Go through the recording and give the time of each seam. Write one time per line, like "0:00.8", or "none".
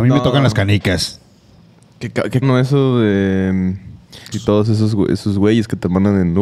0:02.4
0:04.3